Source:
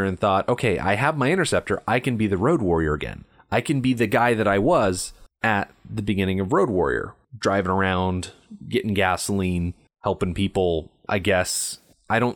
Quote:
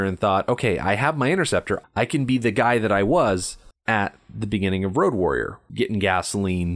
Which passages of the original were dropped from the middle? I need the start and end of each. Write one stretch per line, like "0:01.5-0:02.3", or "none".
0:01.8-0:03.4
0:07.3-0:08.6

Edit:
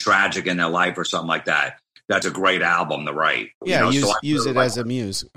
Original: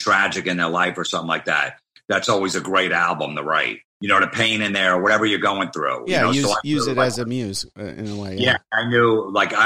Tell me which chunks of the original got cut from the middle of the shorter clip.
0:02.2-0:02.5
0:03.9-0:06.0

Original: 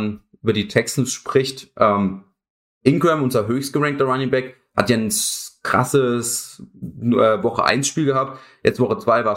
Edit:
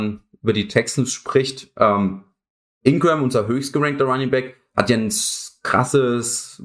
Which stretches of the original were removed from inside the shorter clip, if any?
none

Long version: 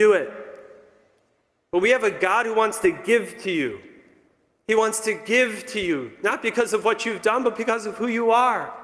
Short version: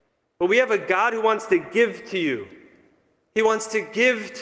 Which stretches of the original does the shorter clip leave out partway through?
none

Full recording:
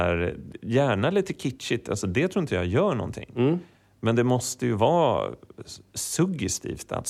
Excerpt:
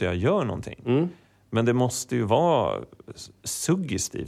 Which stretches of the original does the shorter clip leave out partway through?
none

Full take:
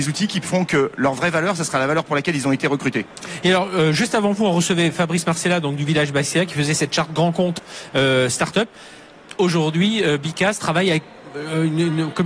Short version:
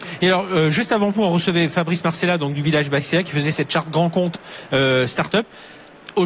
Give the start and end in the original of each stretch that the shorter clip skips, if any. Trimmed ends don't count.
none

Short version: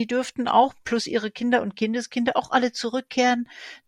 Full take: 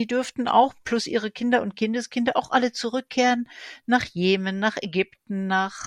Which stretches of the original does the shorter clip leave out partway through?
none

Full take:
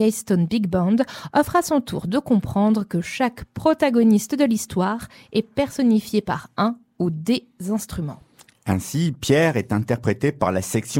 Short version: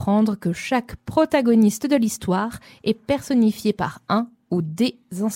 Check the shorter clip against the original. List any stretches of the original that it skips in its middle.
none

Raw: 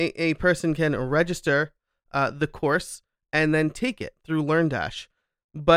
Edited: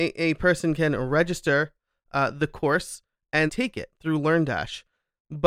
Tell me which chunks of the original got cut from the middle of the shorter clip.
0:03.5-0:03.7

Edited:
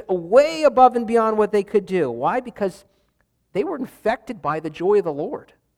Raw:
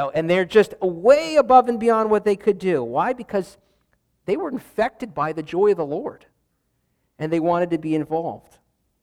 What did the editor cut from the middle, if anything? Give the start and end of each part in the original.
none

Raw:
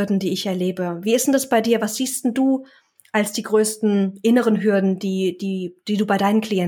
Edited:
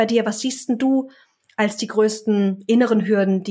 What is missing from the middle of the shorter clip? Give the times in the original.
none

